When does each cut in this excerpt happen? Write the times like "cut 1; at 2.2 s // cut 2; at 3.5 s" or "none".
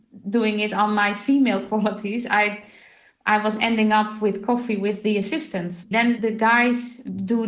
cut 1; at 5.9 s